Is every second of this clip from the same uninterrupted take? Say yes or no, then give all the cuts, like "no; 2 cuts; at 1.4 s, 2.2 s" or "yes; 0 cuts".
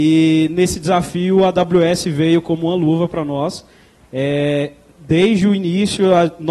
yes; 0 cuts